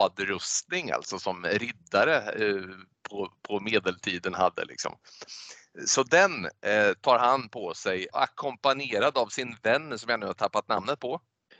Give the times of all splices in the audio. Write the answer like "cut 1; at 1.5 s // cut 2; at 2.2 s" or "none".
cut 1; at 8.1 s